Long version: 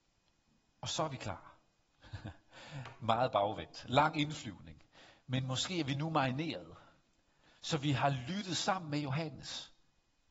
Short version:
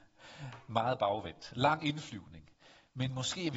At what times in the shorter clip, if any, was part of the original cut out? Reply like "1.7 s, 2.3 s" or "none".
none